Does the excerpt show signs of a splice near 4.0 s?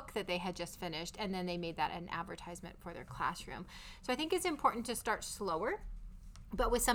no; 0 cuts

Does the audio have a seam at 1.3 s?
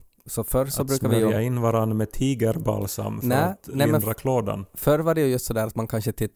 no; 0 cuts

